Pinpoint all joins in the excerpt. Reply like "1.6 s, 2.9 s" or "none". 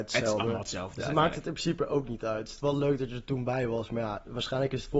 none